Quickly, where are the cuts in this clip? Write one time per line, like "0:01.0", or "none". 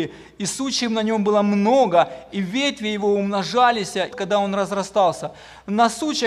0:04.1